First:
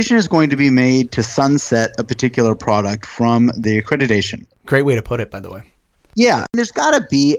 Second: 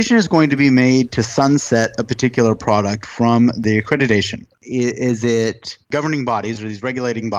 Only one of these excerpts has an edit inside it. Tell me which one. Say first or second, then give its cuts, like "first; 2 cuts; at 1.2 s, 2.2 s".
second; 2 cuts; at 4.5 s, 5.8 s